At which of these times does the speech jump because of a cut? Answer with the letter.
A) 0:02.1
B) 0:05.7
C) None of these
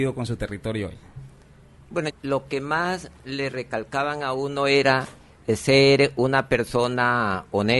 A